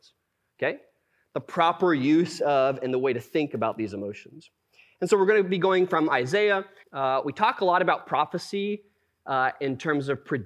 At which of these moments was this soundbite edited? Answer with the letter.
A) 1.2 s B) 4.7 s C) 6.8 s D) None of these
C